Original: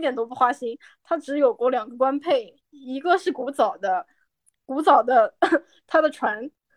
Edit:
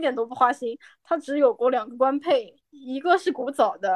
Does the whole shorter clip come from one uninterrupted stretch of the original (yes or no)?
yes